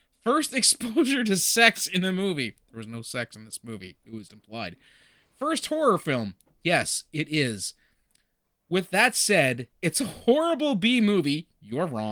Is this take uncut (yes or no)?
no